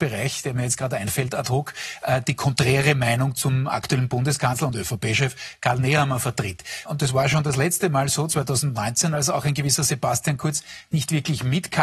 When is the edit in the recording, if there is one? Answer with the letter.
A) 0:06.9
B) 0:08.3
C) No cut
A